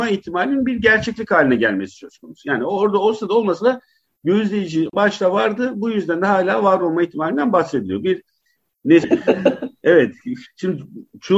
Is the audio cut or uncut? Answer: cut